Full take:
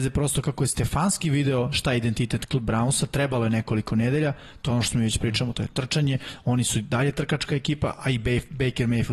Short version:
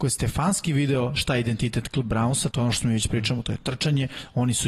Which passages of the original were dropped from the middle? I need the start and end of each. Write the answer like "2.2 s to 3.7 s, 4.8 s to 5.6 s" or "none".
3.1 s to 4.6 s